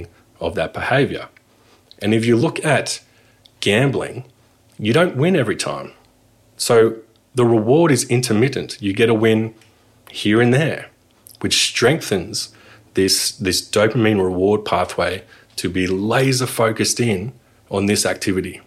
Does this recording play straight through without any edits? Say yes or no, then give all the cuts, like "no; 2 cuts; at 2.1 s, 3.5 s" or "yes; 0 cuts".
yes; 0 cuts